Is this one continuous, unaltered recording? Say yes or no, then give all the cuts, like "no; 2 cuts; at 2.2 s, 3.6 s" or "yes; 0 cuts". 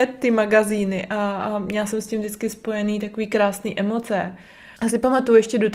no; 1 cut; at 4.8 s